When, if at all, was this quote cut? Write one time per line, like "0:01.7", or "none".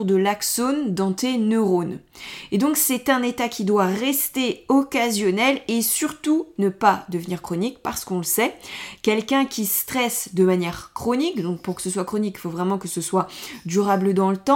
none